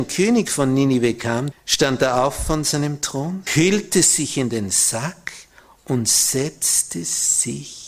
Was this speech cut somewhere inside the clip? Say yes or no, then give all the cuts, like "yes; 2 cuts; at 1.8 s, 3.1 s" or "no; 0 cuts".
yes; 2 cuts; at 1.5 s, 3.5 s